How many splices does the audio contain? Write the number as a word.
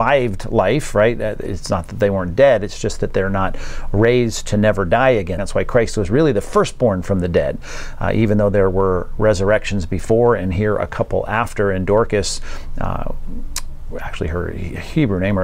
one